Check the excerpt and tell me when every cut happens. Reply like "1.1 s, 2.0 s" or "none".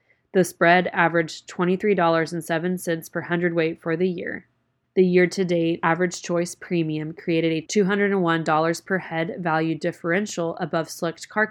none